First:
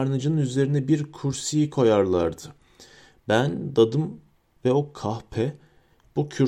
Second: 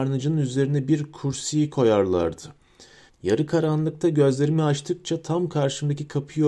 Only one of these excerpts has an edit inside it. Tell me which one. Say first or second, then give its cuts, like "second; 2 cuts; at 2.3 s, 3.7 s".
second; 1 cut; at 3.1 s